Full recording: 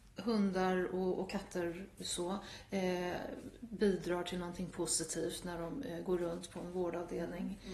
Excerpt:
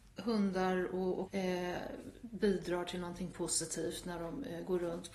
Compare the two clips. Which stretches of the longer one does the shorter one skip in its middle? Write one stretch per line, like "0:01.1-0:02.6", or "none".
0:01.3-0:02.7